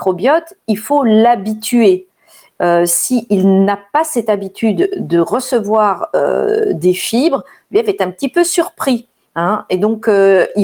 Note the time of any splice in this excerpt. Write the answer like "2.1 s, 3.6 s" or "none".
none

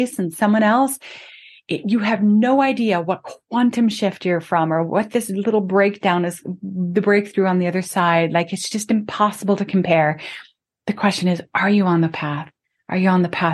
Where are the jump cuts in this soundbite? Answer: none

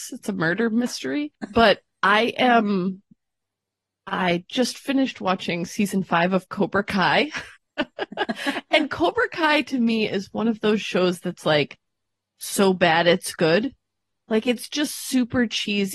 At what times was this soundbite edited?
7.6 s

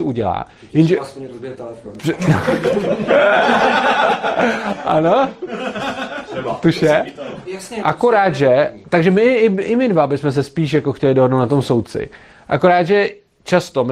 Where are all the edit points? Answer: 7.5 s

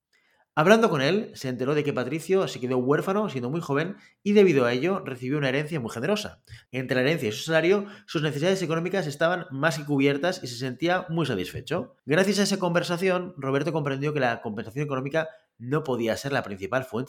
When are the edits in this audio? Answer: 6.7 s, 12.0 s

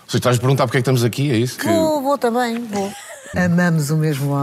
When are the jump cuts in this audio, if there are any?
1.6 s, 3.3 s

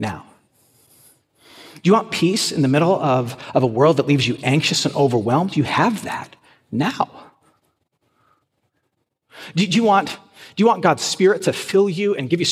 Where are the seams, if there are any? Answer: none

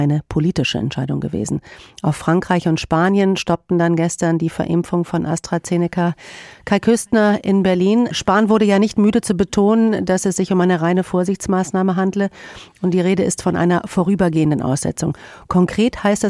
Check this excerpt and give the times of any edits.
none

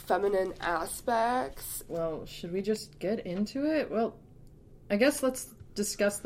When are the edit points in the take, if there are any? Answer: 1.9 s

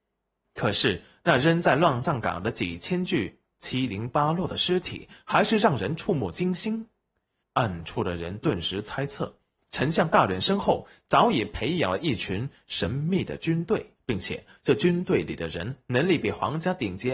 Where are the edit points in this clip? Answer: 7.4 s, 14.0 s

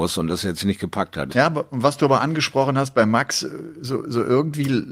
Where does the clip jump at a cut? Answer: 1.3 s

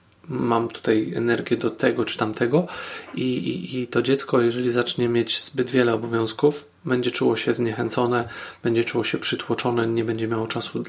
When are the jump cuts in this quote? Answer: none

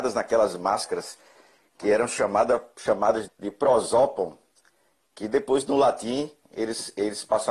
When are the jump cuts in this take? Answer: 3.3 s

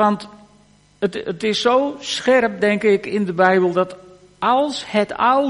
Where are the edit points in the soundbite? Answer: none

